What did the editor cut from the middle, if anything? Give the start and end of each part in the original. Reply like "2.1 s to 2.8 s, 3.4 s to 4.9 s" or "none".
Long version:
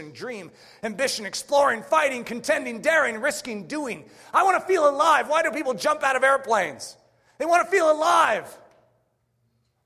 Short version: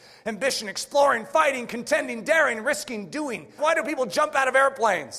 4.2 s to 5.3 s

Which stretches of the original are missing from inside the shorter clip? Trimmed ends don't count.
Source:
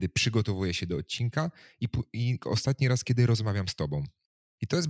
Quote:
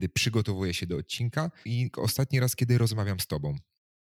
1.6 s to 2.1 s

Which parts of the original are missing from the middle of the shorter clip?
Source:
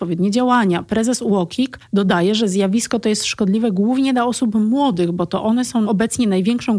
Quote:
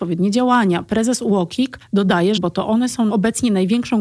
2.4 s to 5.1 s

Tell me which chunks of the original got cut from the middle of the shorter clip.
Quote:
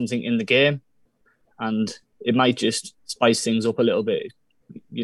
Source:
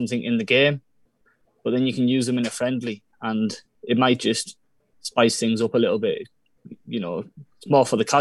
1.5 s to 3.1 s, 4.6 s to 4.9 s

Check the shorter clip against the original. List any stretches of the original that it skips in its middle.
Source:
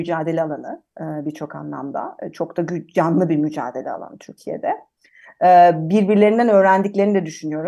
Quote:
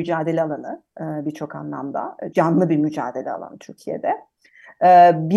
2.3 s to 2.9 s

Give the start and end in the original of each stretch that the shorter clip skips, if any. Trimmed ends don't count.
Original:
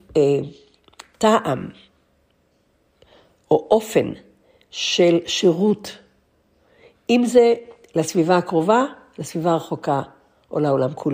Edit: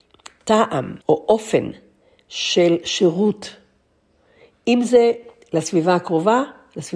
1.7 s to 3.4 s

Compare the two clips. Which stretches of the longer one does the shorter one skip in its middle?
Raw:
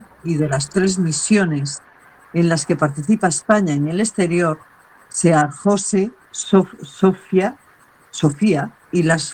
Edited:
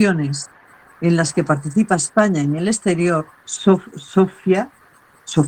4.7 s to 6.3 s

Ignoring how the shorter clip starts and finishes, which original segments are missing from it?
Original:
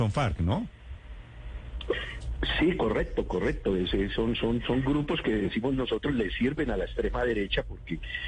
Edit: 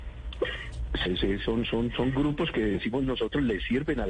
2.5 s to 3.8 s

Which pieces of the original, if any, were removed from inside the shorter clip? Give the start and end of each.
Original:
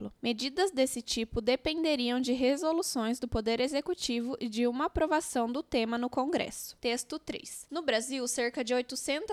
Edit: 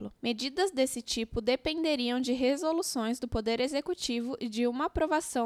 none

